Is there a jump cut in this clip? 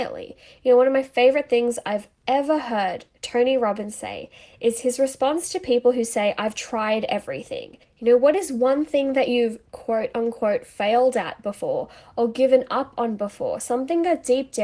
yes; 1 cut; at 7.8 s

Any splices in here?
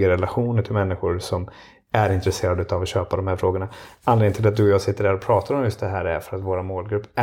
no; 0 cuts

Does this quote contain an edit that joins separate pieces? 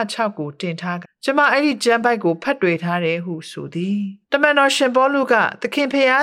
yes; 2 cuts; at 1.0 s, 4.2 s

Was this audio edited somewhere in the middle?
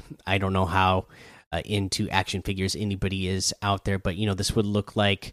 no; 0 cuts

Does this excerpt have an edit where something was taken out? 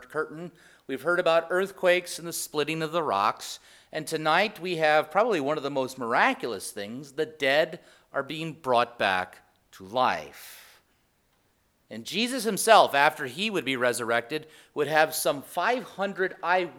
no; 0 cuts

